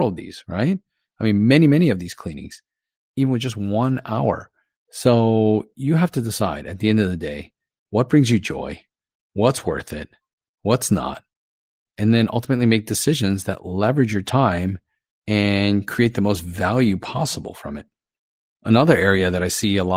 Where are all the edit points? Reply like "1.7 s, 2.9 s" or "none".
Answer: none